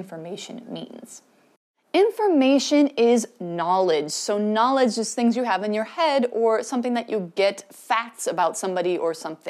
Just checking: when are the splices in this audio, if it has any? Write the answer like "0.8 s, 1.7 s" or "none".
none